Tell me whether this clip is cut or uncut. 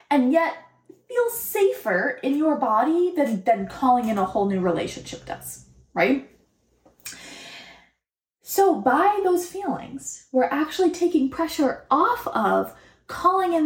uncut